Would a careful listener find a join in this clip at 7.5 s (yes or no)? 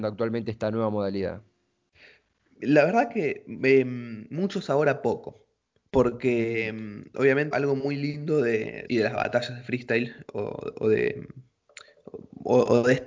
yes